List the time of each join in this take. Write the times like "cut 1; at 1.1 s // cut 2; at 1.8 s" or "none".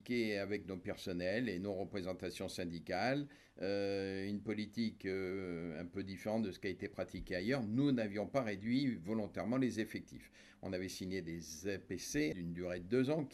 cut 1; at 12.3 s

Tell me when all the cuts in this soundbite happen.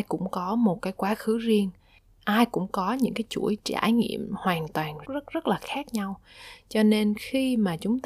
cut 1; at 5.0 s

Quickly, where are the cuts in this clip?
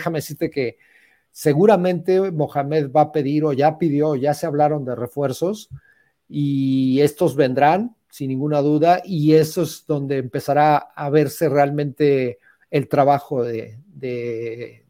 none

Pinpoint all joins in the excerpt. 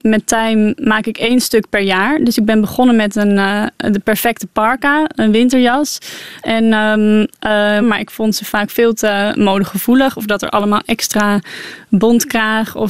cut 1; at 6.4 s // cut 2; at 7.8 s

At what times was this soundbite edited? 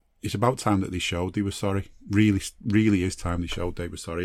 none

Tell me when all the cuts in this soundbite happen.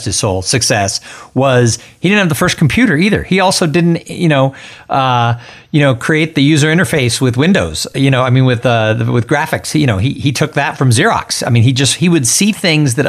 none

